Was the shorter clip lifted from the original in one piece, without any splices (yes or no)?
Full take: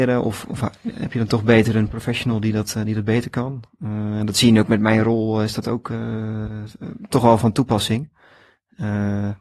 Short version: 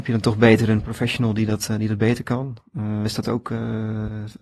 no